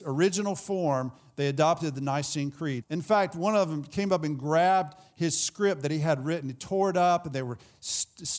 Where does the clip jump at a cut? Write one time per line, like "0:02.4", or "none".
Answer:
0:02.8